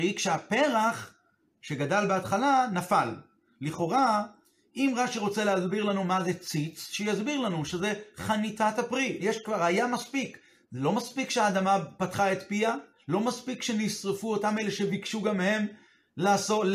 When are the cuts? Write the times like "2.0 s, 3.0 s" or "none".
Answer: 9.2 s, 12.0 s